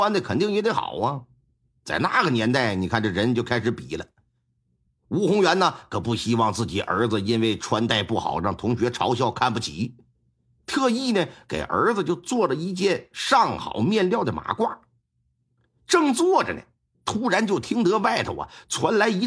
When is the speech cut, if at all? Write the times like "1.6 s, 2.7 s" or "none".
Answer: none